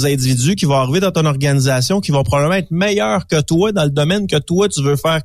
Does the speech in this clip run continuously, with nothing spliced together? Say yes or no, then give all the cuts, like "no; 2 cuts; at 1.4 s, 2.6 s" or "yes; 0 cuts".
yes; 0 cuts